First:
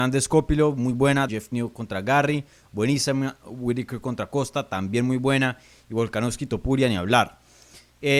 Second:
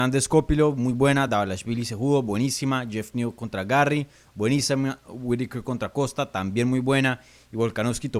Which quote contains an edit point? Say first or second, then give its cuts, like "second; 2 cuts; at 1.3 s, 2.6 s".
first; 1 cut; at 1.3 s